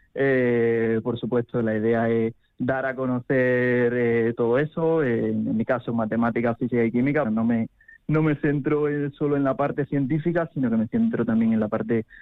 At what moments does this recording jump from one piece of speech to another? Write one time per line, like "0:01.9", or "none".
0:07.3